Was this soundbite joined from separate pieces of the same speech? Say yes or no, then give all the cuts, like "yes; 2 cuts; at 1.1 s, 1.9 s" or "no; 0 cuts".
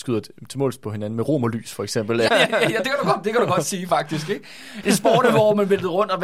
yes; 2 cuts; at 2.3 s, 4.8 s